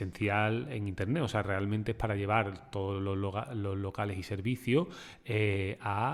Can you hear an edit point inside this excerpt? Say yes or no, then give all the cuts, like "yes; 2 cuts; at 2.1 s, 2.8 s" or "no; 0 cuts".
no; 0 cuts